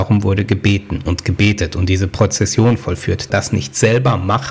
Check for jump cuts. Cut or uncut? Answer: cut